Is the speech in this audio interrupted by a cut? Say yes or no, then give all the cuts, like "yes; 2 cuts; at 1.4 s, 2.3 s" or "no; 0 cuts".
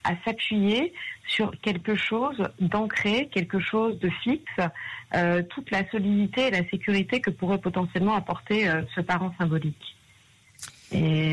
no; 0 cuts